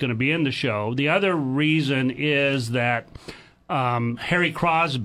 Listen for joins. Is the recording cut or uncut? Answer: uncut